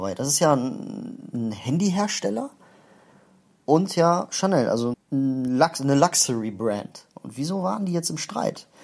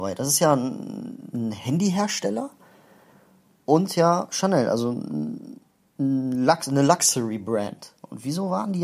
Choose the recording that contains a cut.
first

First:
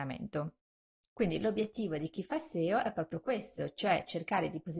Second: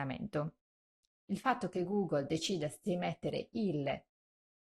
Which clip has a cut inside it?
second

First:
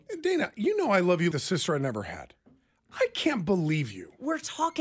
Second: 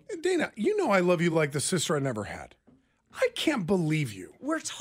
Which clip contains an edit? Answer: first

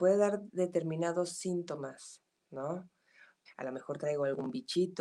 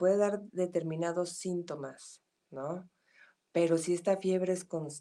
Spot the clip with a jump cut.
first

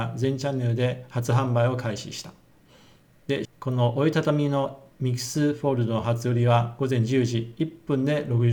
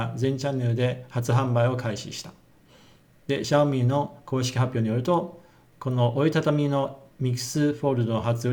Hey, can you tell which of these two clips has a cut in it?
first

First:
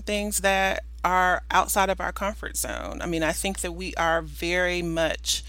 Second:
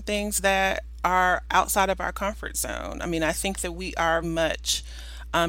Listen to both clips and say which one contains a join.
second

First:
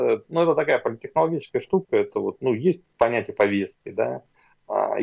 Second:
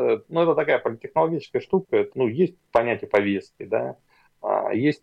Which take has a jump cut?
second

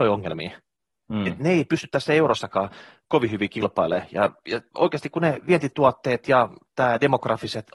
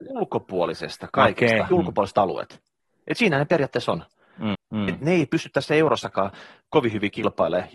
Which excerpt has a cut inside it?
second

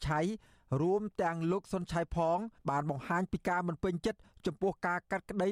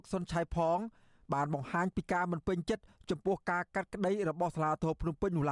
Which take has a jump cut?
first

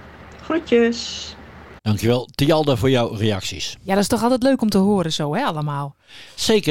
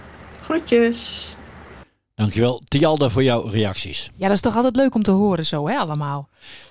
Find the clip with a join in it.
first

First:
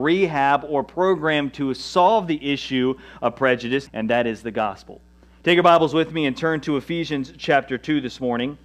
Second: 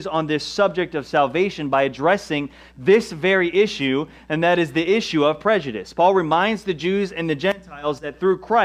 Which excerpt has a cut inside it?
first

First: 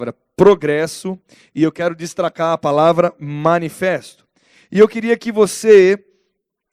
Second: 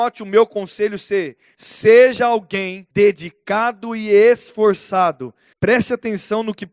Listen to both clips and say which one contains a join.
second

